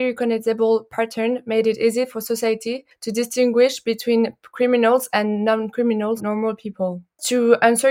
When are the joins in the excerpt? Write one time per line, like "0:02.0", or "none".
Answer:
0:06.2